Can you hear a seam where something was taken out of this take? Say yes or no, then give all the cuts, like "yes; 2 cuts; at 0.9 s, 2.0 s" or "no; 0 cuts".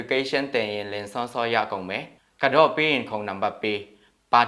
no; 0 cuts